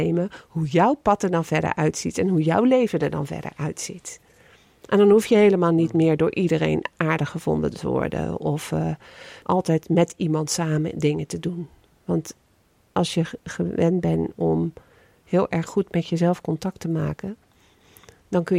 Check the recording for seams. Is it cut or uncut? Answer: cut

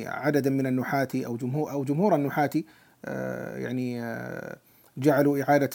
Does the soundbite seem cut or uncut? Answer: uncut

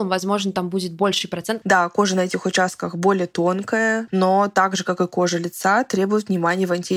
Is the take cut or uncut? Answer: cut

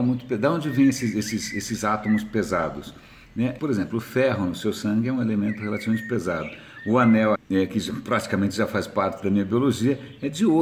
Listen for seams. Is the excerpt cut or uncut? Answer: cut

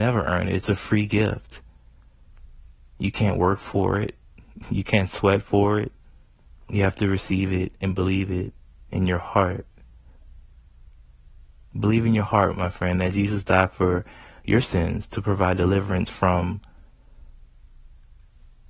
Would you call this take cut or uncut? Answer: uncut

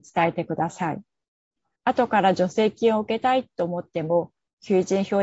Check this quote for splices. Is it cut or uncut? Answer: cut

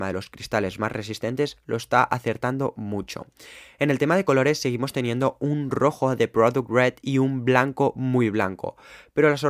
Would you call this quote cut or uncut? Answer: uncut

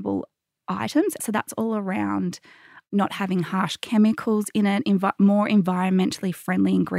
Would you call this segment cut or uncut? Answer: cut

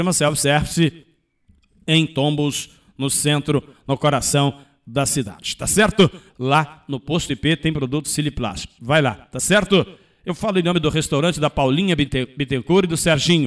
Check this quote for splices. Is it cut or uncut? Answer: cut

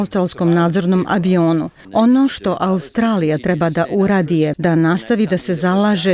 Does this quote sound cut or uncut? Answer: cut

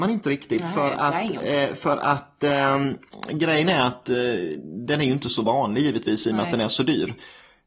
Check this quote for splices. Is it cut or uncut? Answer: uncut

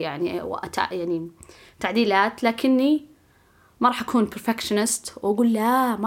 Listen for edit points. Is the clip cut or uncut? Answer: uncut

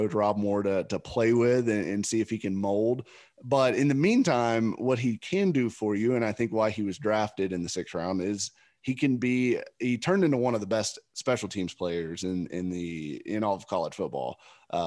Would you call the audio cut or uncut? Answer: uncut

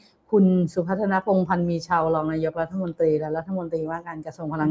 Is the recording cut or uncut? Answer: uncut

